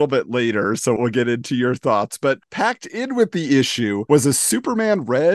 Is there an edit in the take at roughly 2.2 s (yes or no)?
no